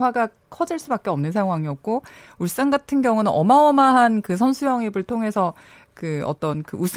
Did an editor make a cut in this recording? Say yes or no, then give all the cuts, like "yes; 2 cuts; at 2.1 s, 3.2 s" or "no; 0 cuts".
no; 0 cuts